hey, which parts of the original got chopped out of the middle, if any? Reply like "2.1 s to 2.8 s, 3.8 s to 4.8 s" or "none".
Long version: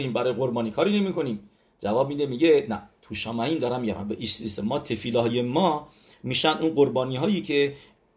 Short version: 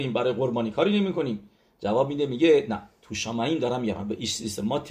none